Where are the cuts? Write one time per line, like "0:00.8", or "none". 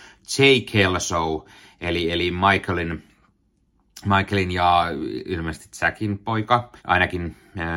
0:06.8